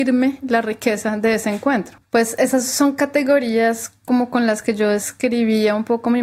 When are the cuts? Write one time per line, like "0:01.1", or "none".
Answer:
0:02.0